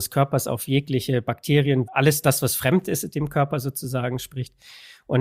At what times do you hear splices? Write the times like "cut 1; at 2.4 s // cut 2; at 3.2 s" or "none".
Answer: cut 1; at 1.9 s

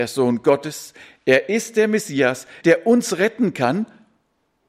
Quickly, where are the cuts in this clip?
cut 1; at 2.6 s

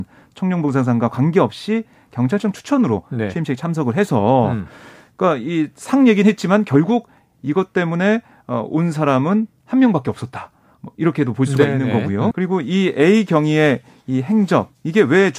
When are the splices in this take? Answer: cut 1; at 12.3 s

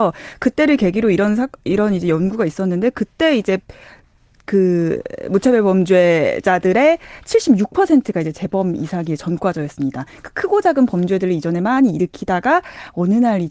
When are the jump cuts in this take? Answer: none

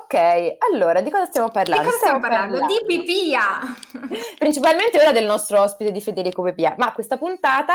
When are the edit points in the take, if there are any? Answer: none

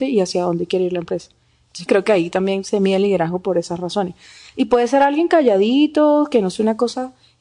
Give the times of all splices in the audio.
cut 1; at 1.9 s

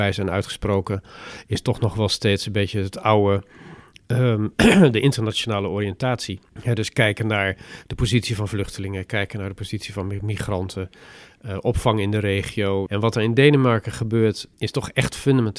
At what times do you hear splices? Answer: cut 1; at 6.5 s // cut 2; at 12.9 s // cut 3; at 14.5 s

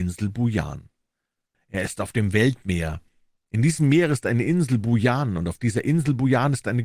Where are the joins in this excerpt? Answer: cut 1; at 1.5 s

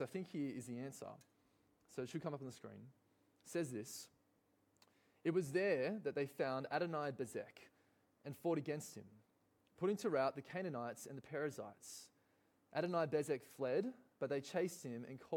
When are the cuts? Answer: none

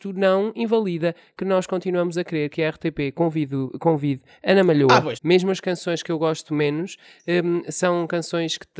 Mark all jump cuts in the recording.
cut 1; at 5.1 s

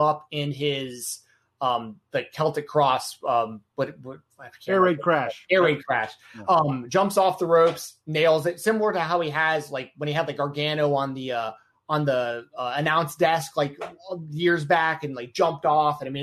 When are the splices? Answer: none

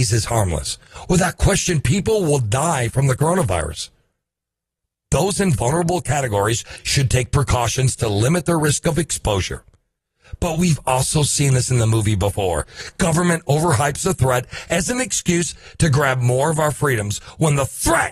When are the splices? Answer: none

